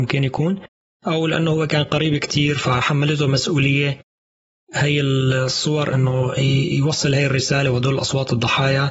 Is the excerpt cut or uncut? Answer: uncut